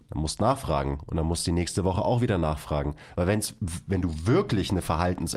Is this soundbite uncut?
yes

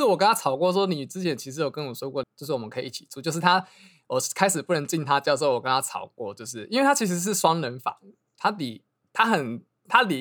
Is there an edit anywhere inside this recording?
yes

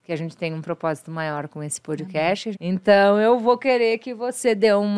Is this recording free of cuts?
no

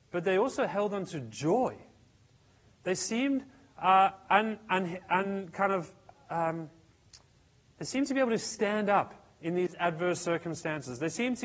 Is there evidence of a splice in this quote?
no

